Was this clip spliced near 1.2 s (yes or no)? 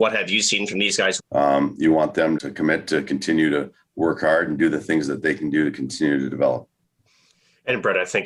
yes